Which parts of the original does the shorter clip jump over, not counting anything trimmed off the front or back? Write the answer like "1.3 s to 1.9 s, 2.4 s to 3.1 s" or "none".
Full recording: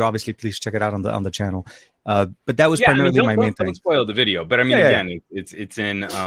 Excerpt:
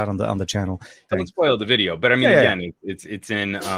1.9 s to 3.6 s